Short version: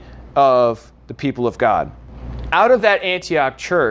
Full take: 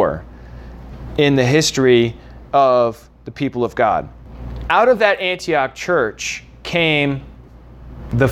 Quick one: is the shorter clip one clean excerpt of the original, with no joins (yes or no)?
yes